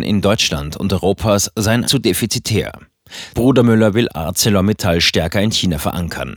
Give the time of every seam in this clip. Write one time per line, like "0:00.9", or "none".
0:01.8
0:03.3